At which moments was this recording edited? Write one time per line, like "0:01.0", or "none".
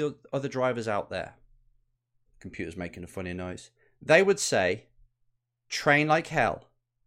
0:02.3